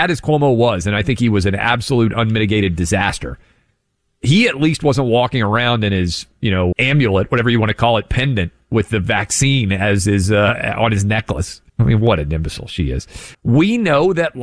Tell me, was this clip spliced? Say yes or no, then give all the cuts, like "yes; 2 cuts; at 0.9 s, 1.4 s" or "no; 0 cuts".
yes; 3 cuts; at 6.7 s, 11.7 s, 13.3 s